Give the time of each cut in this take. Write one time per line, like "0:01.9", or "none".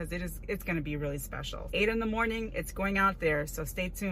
0:01.7